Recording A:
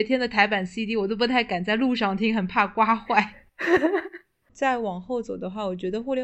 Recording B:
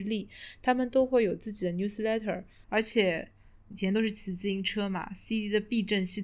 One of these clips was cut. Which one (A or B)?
B